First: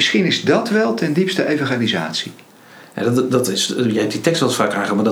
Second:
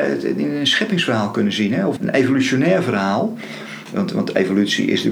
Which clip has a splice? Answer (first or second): second